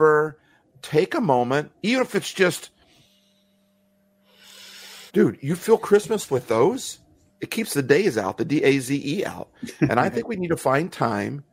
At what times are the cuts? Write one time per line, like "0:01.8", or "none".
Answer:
0:01.8
0:05.1